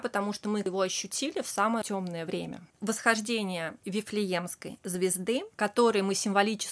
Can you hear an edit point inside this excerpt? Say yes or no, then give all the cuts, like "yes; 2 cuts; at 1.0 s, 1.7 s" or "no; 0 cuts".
yes; 1 cut; at 2.7 s